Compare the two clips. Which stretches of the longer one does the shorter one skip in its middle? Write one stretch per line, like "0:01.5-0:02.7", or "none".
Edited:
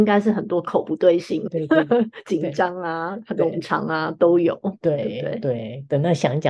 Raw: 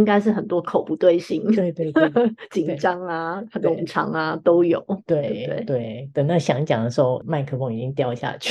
0:01.5-0:01.7